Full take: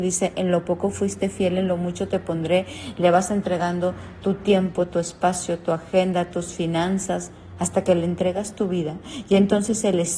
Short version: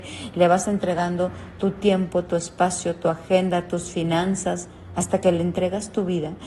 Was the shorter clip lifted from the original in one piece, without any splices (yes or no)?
yes